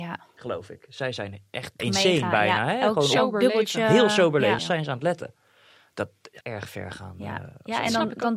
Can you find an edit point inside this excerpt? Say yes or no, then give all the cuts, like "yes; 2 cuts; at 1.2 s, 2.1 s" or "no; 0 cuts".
yes; 3 cuts; at 1.8 s, 4.6 s, 6.4 s